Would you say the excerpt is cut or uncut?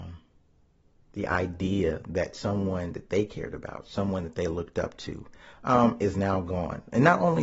uncut